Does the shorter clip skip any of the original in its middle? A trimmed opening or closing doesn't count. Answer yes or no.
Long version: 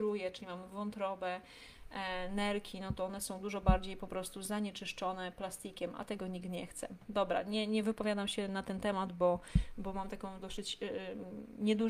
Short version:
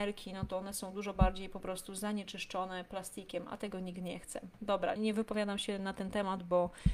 yes